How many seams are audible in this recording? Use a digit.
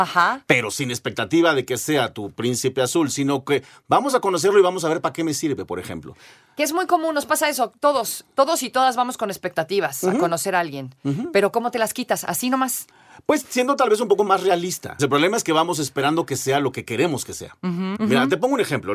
2